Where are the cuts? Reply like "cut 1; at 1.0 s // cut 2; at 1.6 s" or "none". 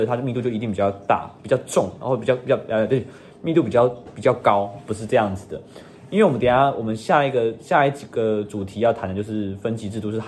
none